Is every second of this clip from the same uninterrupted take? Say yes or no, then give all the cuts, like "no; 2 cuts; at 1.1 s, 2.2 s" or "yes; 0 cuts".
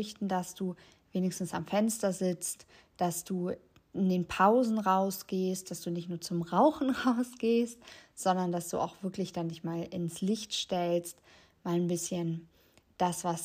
yes; 0 cuts